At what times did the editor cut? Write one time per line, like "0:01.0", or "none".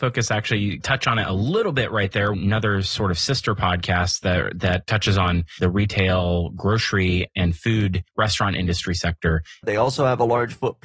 0:02.3
0:09.6